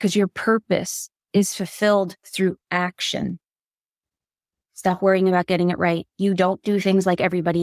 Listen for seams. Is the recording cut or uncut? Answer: cut